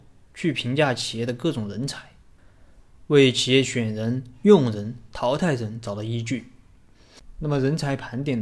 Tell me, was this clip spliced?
yes; 1 cut; at 5.1 s

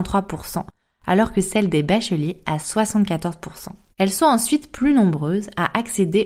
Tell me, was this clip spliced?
yes; 1 cut; at 3.9 s

